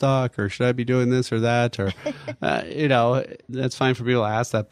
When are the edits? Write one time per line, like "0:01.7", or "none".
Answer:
none